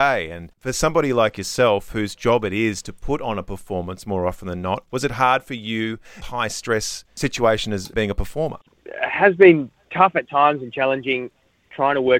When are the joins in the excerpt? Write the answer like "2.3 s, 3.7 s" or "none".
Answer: 6.2 s